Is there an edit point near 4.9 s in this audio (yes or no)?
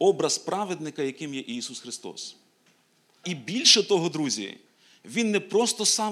no